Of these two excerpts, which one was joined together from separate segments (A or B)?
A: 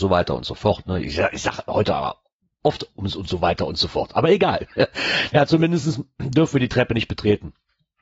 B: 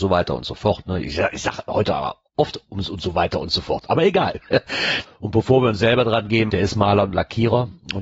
B